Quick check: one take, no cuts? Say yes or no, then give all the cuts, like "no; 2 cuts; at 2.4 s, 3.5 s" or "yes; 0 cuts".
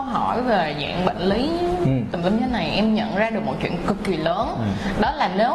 yes; 0 cuts